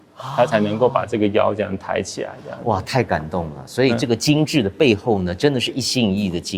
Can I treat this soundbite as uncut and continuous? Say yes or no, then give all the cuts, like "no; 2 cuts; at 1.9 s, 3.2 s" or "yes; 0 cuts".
yes; 0 cuts